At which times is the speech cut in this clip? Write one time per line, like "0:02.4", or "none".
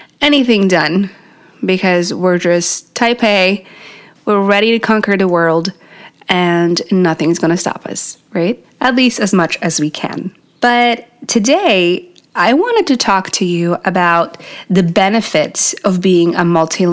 none